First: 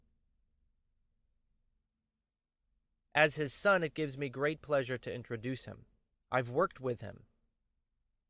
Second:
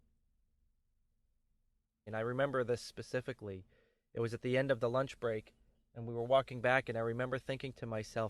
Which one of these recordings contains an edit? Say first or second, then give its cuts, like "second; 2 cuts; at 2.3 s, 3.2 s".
second; 1 cut; at 2.1 s